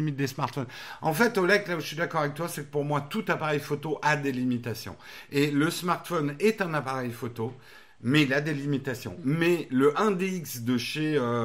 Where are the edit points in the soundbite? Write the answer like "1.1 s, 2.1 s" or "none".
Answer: none